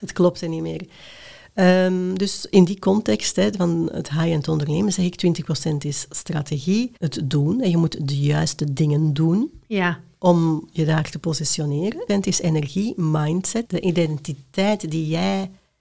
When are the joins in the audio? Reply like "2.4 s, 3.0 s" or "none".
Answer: 7.0 s, 12.1 s, 13.6 s